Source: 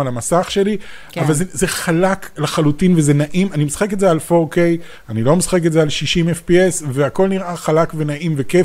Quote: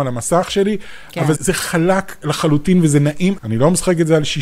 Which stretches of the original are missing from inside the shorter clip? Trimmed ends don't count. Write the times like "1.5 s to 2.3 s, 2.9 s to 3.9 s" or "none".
1.3 s to 1.5 s, 3.5 s to 5.0 s